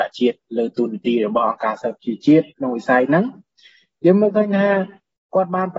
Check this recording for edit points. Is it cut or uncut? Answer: cut